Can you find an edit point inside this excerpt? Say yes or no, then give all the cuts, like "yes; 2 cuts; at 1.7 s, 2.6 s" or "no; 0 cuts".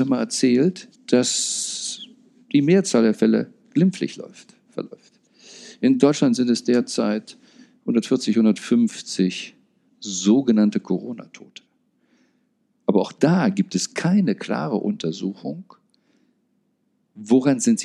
yes; 1 cut; at 0.9 s